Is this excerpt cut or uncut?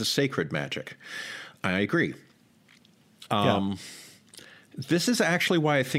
cut